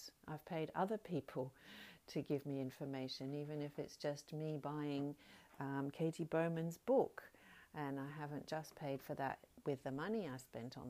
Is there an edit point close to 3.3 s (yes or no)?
no